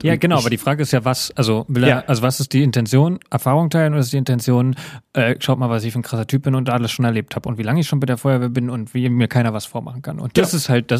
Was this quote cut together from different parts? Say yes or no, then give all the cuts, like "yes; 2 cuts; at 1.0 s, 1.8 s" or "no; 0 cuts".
no; 0 cuts